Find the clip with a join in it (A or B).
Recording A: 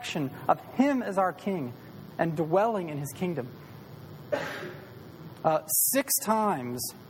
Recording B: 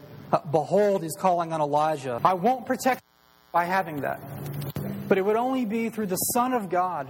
B